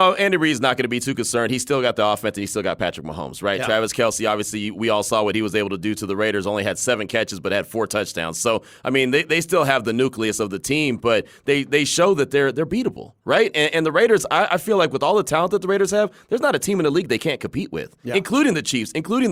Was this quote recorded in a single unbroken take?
yes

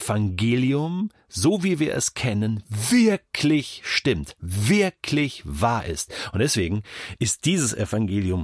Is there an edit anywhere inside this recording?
no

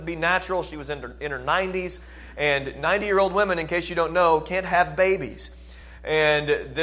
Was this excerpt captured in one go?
yes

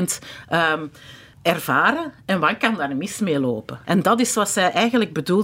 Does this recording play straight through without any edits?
no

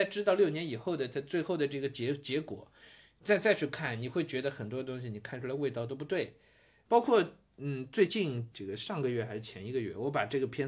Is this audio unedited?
no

